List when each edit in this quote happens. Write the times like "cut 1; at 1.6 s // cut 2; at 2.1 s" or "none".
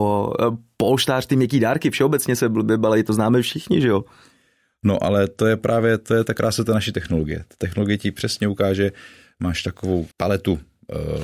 cut 1; at 10.1 s